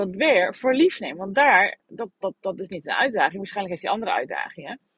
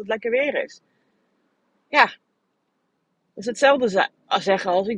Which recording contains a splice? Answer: first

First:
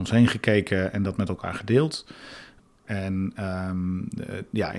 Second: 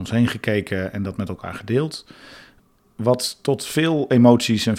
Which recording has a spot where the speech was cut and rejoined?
first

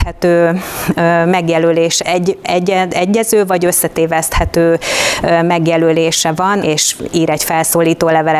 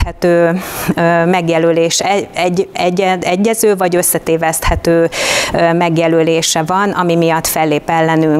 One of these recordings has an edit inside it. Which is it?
first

